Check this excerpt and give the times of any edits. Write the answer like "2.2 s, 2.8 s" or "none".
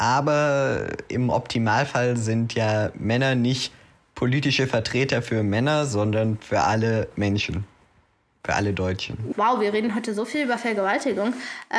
9.3 s